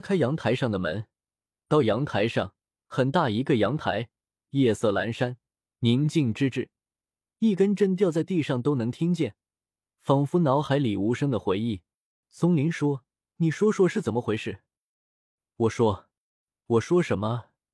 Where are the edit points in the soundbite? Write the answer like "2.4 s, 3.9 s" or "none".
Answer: 12.2 s

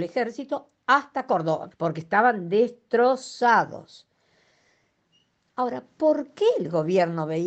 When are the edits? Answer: 1.7 s

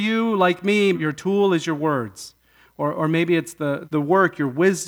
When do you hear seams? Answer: 0.9 s, 3.8 s

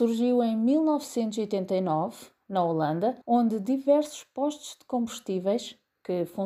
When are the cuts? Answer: 3.2 s

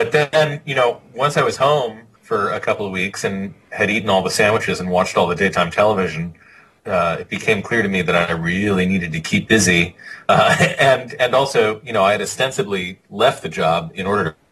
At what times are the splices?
2.2 s, 6.8 s

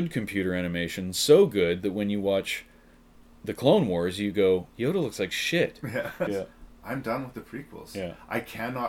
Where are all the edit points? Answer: 6.3 s

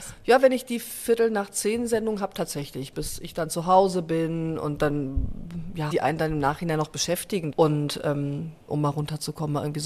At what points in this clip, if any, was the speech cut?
5.9 s, 7.5 s, 8.7 s

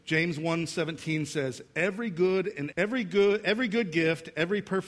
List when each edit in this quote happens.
2.7 s

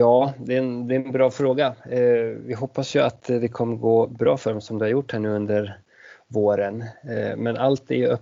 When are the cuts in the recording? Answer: none

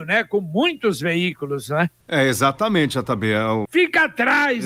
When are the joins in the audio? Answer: 2.0 s, 3.7 s

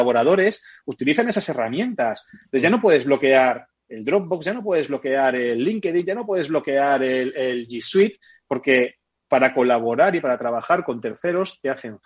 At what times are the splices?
none

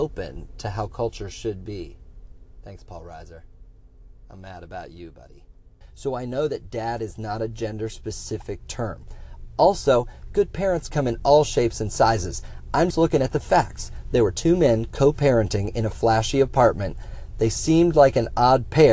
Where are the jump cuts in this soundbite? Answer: 5.8 s, 12.9 s

